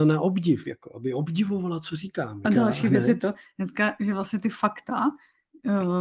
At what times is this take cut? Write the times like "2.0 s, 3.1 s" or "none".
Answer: 2.4 s